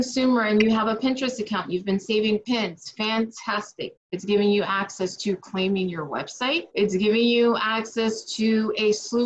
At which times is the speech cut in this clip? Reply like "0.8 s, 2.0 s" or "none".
4.0 s, 6.7 s